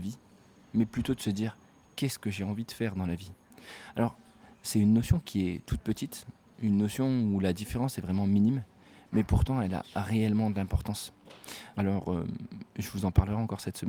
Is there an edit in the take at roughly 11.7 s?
yes; 1 cut; at 11.7 s

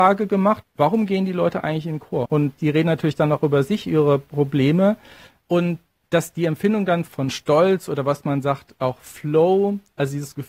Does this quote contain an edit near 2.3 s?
yes; 1 cut; at 2.3 s

